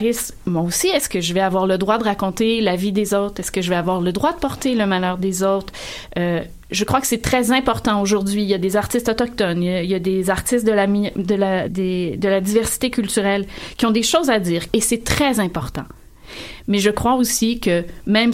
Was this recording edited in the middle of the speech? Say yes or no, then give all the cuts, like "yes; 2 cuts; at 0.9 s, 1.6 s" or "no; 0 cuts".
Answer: yes; 2 cuts; at 11.7 s, 14.7 s